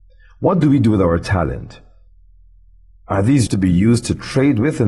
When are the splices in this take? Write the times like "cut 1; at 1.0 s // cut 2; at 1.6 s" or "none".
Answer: cut 1; at 3.5 s